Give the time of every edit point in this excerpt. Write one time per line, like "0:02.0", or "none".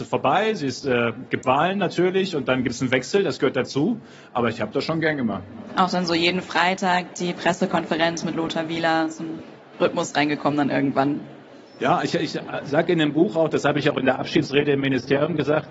none

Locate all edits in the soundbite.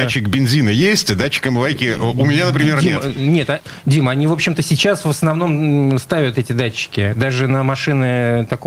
none

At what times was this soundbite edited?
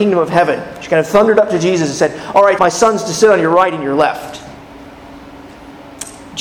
0:02.6

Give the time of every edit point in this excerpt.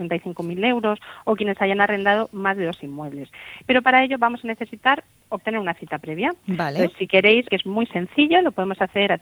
0:03.6
0:07.5

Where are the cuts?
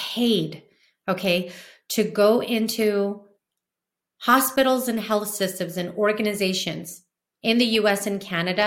none

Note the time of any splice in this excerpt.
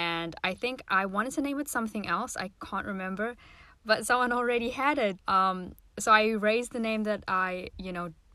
0:05.2

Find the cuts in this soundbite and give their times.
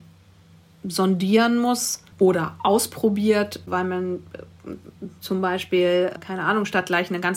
0:02.1

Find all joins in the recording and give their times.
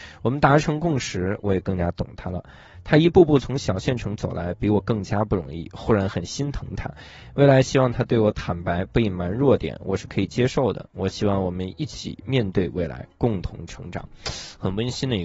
none

